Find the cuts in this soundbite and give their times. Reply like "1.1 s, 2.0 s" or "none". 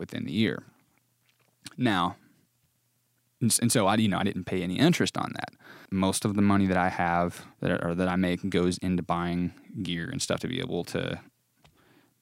5.9 s, 7.5 s